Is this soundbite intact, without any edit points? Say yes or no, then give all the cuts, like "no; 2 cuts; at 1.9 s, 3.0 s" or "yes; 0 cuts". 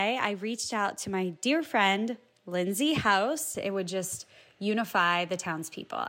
no; 1 cut; at 3.5 s